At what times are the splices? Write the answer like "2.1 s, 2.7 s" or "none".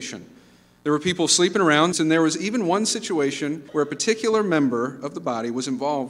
1.9 s, 3.7 s